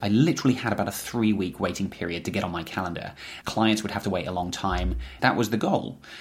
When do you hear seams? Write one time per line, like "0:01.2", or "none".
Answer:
0:03.4
0:05.2

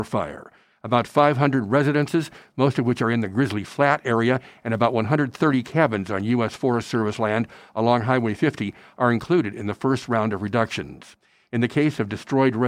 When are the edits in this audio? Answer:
none

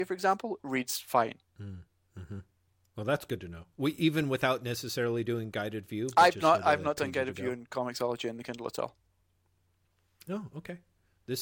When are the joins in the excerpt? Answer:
0:01.5

